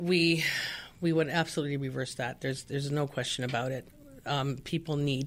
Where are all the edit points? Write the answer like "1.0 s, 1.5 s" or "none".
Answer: none